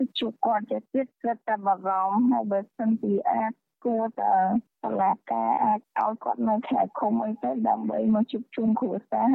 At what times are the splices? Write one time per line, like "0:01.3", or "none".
none